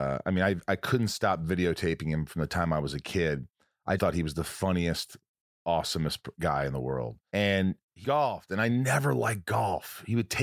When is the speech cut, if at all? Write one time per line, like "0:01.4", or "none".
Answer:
0:04.0
0:08.0